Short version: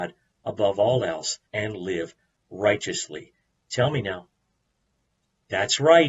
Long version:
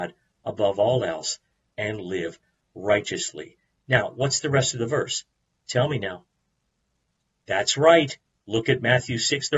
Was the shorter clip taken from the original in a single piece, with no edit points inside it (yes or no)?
no